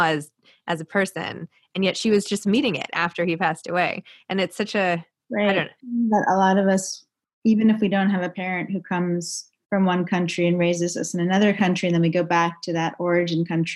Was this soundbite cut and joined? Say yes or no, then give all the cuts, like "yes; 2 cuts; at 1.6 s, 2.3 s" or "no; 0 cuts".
no; 0 cuts